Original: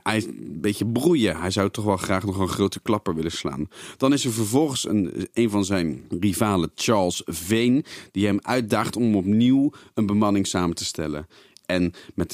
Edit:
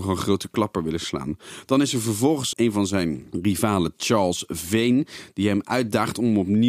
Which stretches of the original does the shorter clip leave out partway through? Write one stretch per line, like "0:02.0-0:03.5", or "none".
0:04.8-0:05.3